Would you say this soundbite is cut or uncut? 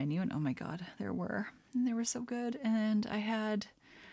uncut